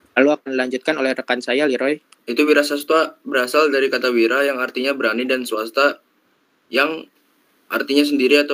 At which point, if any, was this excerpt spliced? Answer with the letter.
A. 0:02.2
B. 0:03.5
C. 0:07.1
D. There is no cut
A